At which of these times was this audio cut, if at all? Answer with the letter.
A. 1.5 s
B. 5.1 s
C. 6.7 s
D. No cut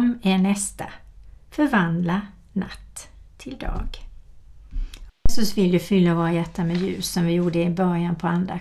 B